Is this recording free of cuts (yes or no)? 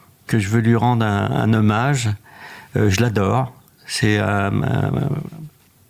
yes